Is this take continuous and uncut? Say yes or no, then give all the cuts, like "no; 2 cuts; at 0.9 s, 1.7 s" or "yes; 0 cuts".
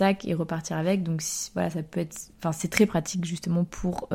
yes; 0 cuts